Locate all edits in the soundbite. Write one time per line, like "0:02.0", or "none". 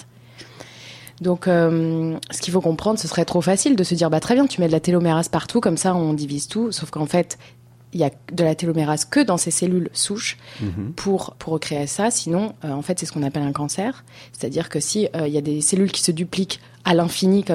0:11.3